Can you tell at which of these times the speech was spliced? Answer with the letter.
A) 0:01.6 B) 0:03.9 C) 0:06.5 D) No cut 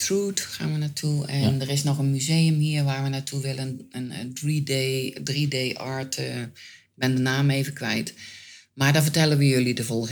D